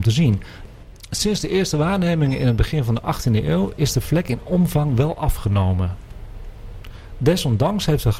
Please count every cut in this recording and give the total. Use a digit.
0